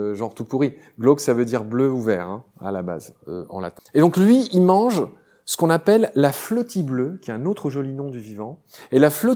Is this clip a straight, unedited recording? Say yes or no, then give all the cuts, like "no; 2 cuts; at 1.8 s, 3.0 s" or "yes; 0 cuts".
no; 1 cut; at 3.8 s